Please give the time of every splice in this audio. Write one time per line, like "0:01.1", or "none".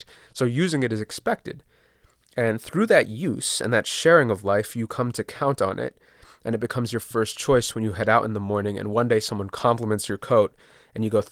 none